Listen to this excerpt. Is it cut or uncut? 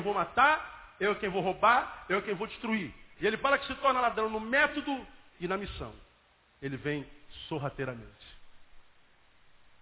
uncut